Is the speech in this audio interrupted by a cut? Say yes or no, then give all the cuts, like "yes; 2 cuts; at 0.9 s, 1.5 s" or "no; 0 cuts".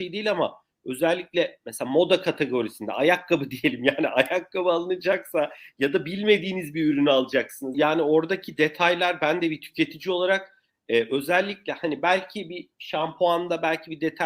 yes; 1 cut; at 7.7 s